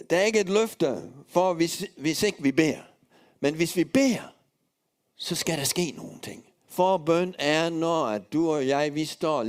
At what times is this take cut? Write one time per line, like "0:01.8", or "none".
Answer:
0:06.6